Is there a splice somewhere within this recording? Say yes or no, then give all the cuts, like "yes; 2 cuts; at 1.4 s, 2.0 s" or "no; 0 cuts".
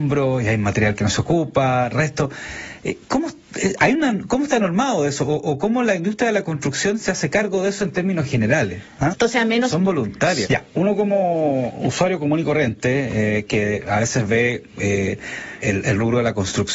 yes; 3 cuts; at 9.1 s, 10.5 s, 15.6 s